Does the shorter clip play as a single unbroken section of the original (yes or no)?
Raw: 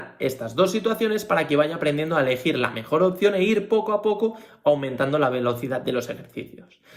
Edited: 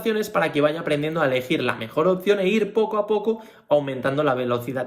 yes